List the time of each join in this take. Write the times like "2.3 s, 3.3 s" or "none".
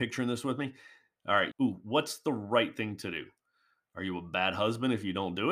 1.5 s